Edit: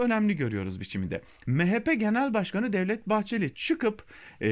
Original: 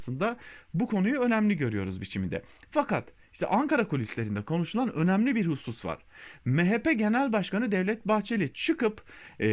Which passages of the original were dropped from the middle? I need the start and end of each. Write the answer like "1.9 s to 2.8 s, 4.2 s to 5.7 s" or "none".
2.7 s to 6.4 s